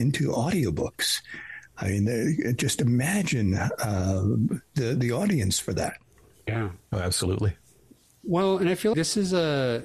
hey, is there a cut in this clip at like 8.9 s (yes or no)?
yes